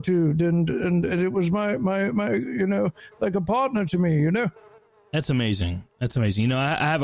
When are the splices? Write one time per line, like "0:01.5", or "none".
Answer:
none